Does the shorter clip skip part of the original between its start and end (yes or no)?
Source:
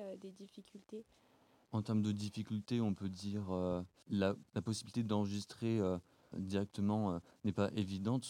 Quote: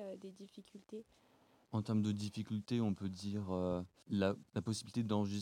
no